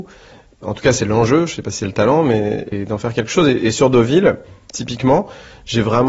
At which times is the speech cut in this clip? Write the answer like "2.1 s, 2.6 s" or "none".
none